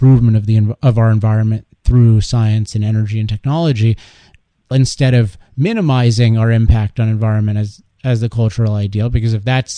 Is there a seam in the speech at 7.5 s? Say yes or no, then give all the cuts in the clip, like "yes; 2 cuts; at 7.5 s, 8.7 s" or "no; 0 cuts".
no; 1 cut; at 4.7 s